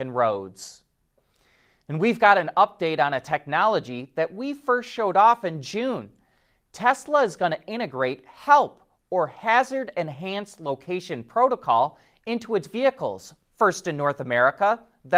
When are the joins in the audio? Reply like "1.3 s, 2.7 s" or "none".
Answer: none